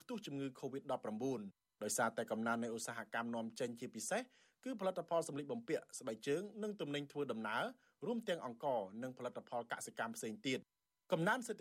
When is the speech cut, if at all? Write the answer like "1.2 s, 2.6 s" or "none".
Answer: none